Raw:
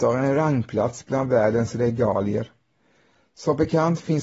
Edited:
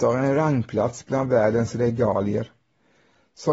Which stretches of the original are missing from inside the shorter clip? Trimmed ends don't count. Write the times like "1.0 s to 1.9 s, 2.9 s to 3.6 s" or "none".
none

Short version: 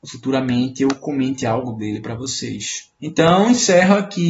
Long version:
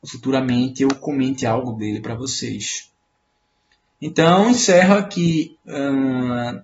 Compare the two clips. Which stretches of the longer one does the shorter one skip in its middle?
3.0 s to 4.0 s

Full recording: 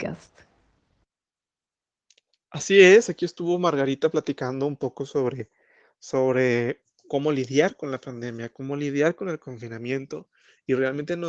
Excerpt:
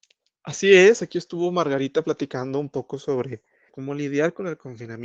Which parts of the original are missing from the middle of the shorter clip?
5.8 s to 8.5 s

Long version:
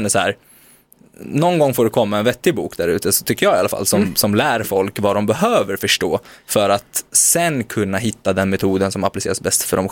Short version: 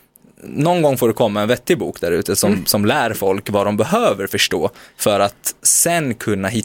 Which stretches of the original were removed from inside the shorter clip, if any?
3.1 s to 3.8 s

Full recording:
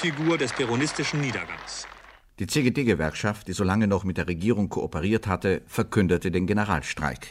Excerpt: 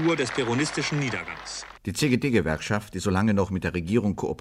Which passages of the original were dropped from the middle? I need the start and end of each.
2.0 s to 2.3 s

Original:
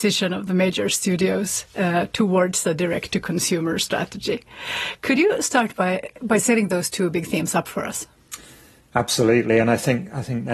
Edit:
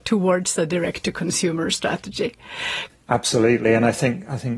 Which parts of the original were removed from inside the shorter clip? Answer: 5.0 s to 8.7 s

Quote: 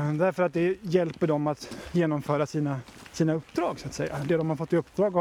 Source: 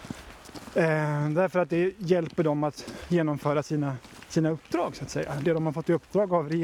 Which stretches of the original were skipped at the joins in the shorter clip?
none

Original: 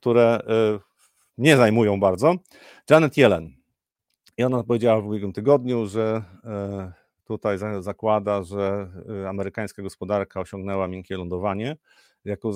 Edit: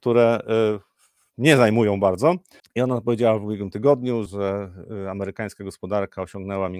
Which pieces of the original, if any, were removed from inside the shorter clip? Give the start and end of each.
2.6 s to 4.2 s, 5.9 s to 8.4 s

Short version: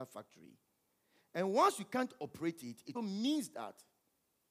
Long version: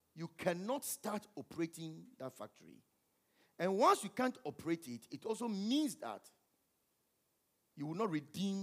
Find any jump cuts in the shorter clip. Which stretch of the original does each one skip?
5.2 s to 5.4 s

